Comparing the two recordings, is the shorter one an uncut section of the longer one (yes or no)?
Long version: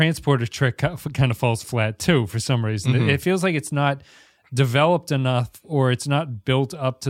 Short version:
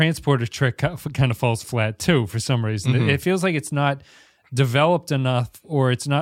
yes